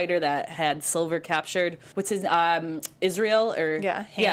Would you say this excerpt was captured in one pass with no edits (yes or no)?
no